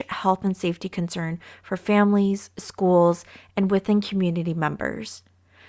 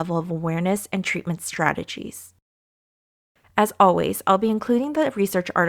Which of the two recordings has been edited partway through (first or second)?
second